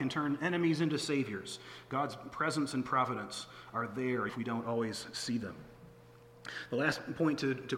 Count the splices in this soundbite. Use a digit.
1